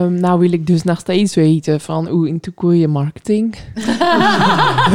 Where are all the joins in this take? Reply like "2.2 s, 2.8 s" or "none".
none